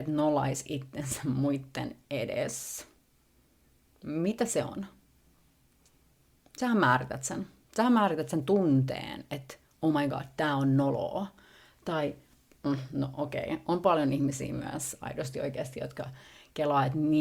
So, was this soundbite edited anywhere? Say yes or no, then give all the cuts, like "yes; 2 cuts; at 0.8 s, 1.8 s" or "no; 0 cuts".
no; 0 cuts